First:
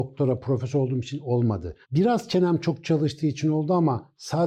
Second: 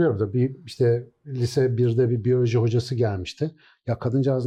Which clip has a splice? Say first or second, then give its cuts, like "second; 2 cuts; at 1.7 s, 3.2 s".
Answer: first; 1 cut; at 1.8 s